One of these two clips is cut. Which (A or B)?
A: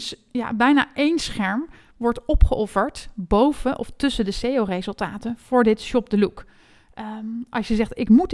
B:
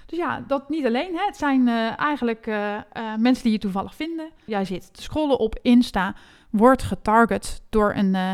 B